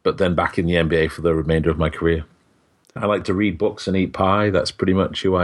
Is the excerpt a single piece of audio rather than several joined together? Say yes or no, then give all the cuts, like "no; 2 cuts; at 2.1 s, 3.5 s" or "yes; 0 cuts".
no; 1 cut; at 3.0 s